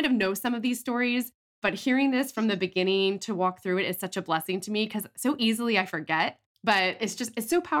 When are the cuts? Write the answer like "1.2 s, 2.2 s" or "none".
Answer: none